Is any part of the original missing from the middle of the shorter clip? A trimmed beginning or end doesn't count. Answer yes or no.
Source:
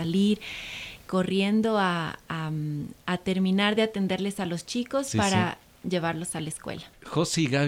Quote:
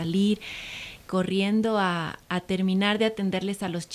yes